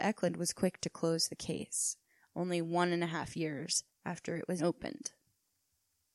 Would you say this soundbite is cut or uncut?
cut